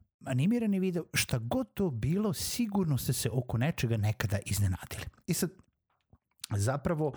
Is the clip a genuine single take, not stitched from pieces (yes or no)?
yes